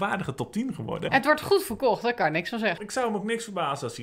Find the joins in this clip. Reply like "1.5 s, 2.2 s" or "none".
1.1 s, 2.8 s